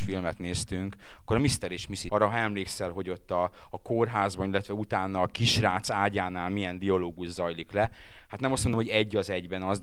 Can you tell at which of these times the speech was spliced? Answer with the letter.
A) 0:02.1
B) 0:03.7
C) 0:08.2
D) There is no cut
A